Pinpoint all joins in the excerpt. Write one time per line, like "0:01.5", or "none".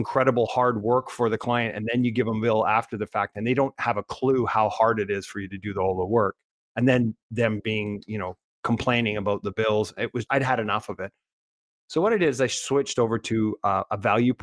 0:10.2

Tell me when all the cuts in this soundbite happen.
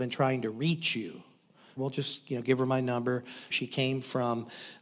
0:01.8
0:03.5

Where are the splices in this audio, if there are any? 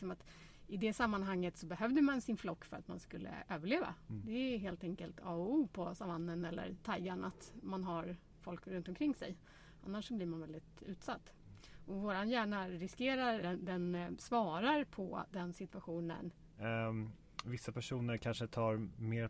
0:13.4
0:16.6

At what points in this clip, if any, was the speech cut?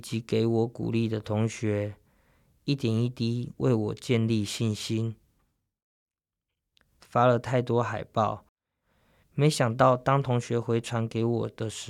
0:07.0

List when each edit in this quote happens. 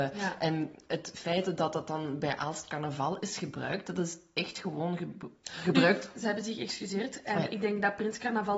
0:06.1

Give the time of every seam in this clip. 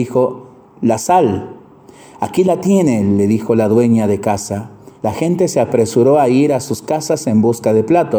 0:05.0

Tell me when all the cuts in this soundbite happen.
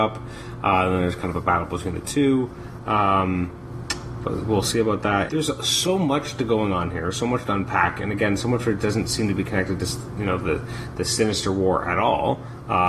0:02.8
0:05.3

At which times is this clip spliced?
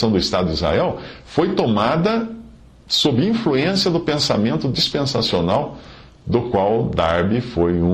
none

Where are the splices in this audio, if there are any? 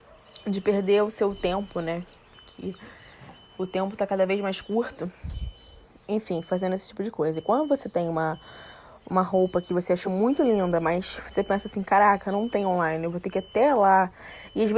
none

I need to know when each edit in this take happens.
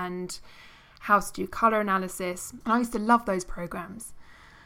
0:02.6

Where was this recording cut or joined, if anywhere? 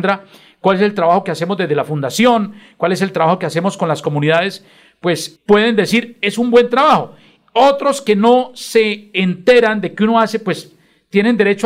0:05.4

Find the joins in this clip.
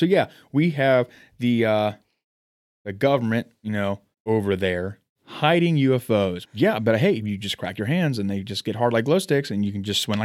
0:06.5

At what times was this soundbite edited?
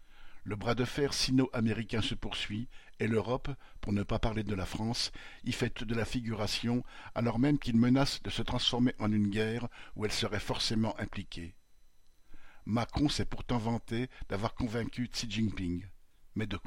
0:05.8

